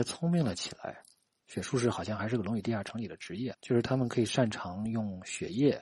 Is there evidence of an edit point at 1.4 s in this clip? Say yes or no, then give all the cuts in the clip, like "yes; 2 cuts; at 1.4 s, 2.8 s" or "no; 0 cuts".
yes; 2 cuts; at 1.4 s, 3.5 s